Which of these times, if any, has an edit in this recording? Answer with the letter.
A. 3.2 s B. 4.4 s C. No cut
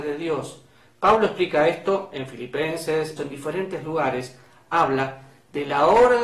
A